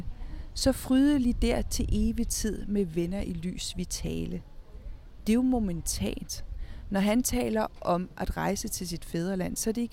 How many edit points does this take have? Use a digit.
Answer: 0